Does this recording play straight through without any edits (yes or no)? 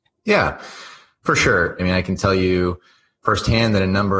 no